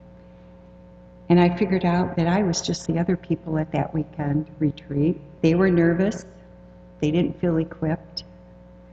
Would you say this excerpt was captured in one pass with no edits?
no; 2 cuts; at 2.9 s, 5.4 s

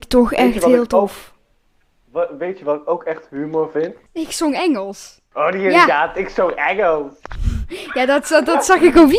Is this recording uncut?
no; 2 cuts; at 4.1 s, 5.3 s

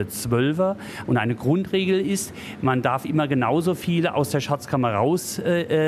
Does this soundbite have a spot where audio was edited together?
yes; 1 cut; at 1.1 s

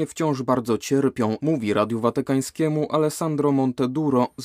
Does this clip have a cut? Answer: yes; 1 cut; at 1.4 s

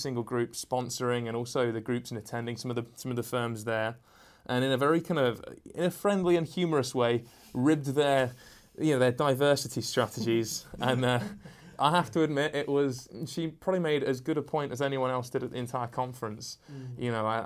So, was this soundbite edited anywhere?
no; 0 cuts

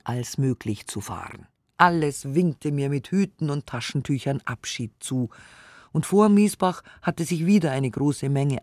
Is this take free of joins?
yes; 0 cuts

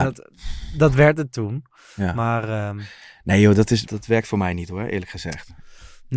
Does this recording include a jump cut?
yes; 1 cut; at 3.8 s

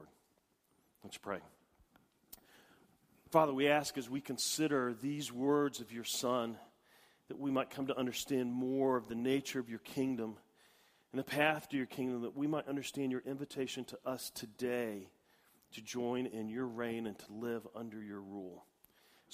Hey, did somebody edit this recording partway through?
no; 0 cuts

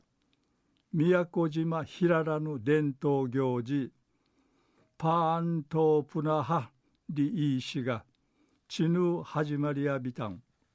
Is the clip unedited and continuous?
yes; 0 cuts

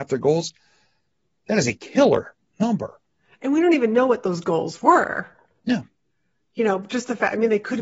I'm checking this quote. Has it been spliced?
no; 0 cuts

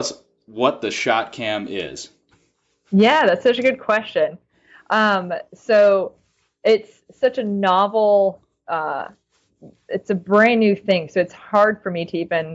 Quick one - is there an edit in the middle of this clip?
no; 0 cuts

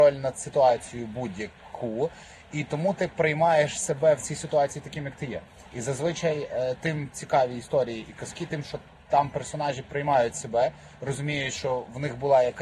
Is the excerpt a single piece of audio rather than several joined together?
yes; 0 cuts

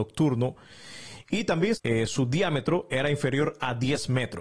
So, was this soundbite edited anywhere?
yes; 1 cut; at 1.8 s

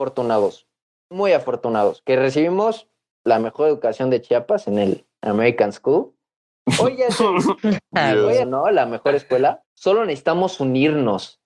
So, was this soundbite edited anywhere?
yes; 2 cuts; at 8.4 s, 9.6 s

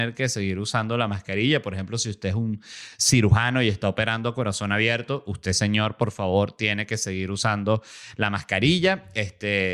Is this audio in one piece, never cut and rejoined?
yes; 0 cuts

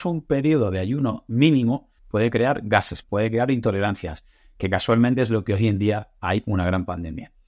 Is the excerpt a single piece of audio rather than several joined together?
no; 2 cuts; at 2.0 s, 3.0 s

